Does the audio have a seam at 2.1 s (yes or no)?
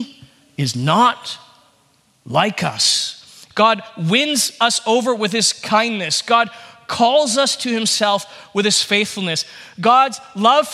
no